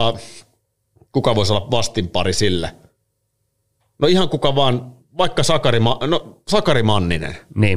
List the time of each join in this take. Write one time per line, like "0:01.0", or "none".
none

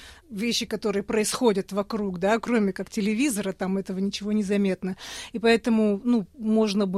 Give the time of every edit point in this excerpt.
none

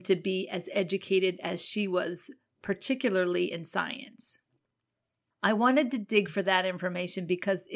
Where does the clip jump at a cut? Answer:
0:05.3

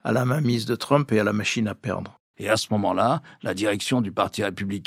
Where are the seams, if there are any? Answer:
0:02.3

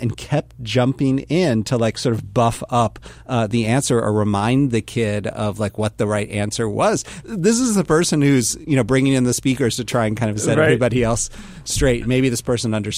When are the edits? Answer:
0:07.2

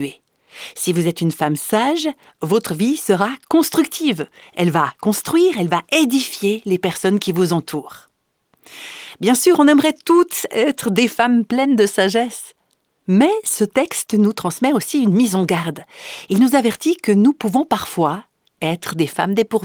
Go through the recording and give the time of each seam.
none

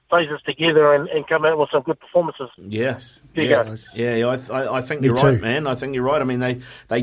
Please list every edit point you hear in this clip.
0:02.6

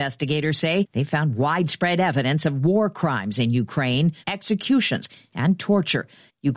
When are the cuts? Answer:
0:04.2

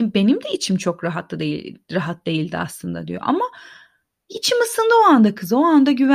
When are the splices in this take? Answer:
none

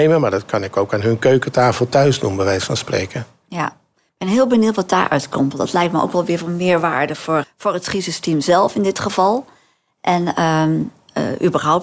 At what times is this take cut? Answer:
0:07.4

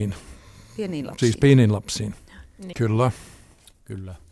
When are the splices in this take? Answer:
0:02.7

